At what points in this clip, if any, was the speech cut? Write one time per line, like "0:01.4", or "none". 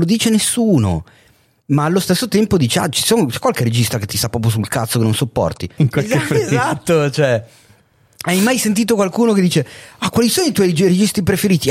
0:05.8